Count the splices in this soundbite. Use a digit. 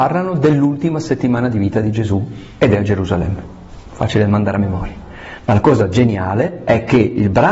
0